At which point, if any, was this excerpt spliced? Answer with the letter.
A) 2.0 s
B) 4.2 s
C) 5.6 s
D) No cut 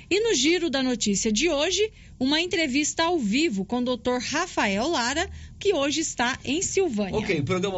C